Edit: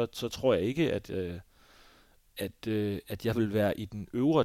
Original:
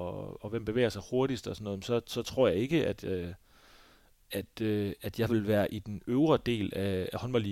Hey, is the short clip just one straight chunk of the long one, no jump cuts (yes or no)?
yes